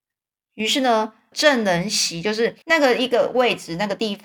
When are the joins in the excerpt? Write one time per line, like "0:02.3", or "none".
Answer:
0:01.3
0:02.6

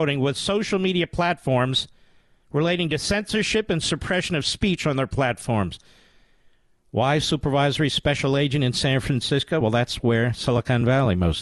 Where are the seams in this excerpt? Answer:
none

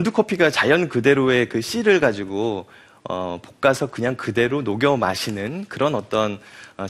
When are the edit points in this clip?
none

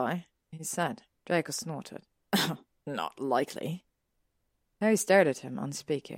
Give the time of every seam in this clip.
0:01.1

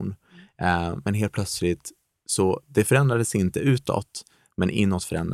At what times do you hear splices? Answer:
none

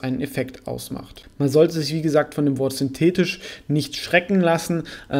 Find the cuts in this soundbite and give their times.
none

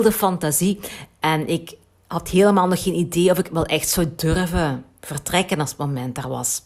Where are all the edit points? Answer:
none

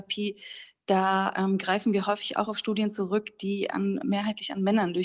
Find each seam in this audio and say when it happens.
0:04.0

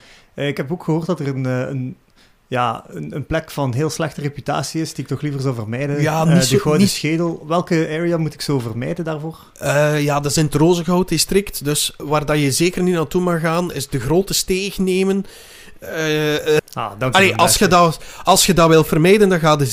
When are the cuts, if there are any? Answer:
0:13.7
0:16.6

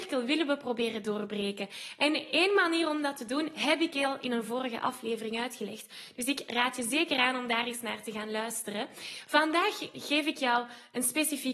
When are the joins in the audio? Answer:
none

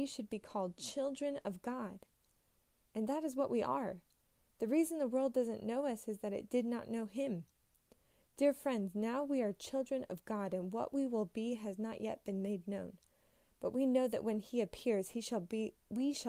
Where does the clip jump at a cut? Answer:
none

